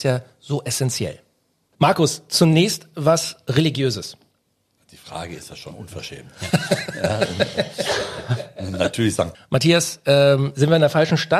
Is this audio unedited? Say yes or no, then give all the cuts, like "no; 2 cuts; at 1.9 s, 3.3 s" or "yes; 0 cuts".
no; 2 cuts; at 4.8 s, 9.3 s